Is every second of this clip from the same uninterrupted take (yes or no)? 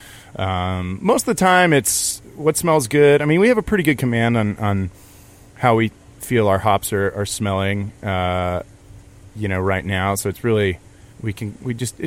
no